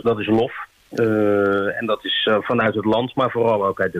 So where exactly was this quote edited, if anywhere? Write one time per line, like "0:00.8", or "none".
none